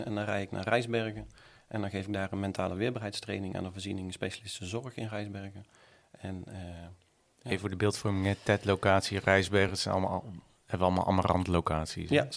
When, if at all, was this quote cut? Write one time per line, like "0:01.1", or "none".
none